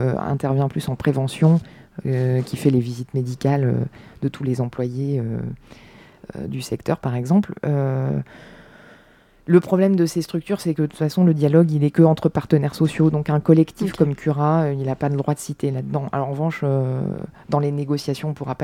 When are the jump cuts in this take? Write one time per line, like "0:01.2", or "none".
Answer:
none